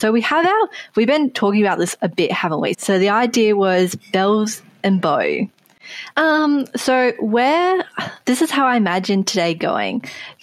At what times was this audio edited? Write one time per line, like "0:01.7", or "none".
0:02.7
0:06.1